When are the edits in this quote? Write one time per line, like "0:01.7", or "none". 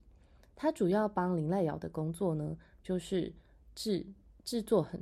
none